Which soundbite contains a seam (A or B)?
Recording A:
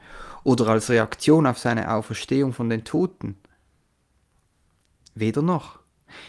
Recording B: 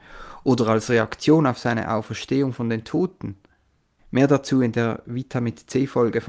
B